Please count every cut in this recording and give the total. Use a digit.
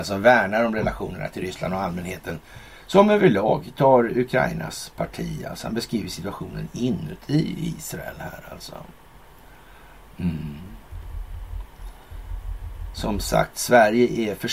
1